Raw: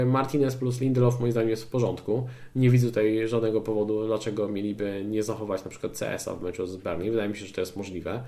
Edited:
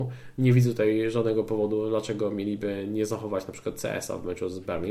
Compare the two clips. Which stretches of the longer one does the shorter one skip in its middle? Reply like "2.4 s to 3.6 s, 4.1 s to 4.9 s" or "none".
none